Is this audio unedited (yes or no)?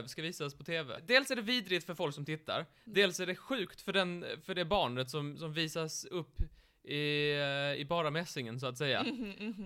yes